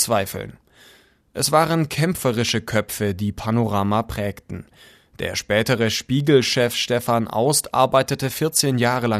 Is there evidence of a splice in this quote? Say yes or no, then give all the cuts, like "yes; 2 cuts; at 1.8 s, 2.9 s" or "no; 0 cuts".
no; 0 cuts